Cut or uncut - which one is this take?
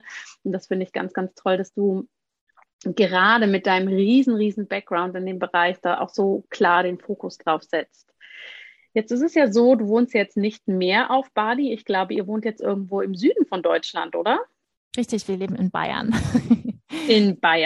uncut